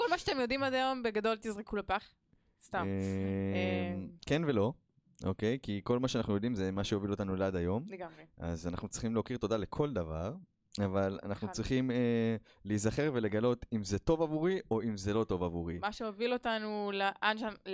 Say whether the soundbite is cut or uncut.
uncut